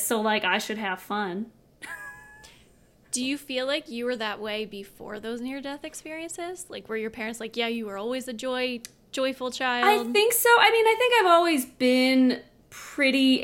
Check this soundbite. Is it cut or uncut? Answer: uncut